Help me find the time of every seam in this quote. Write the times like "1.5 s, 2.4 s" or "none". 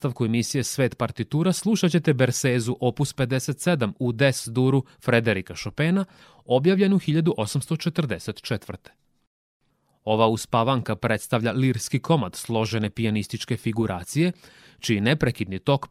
none